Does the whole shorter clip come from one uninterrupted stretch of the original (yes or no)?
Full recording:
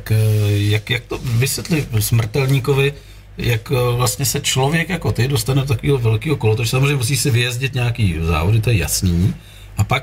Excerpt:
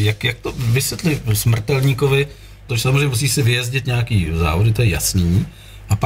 no